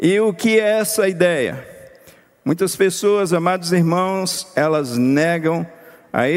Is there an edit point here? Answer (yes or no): no